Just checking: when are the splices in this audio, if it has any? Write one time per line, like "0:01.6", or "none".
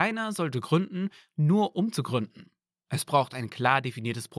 none